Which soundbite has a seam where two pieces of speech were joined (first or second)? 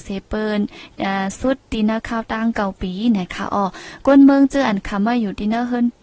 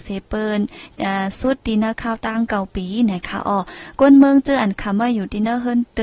second